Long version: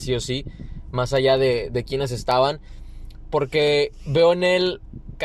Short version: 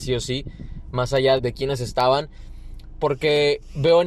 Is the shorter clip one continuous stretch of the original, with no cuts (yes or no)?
no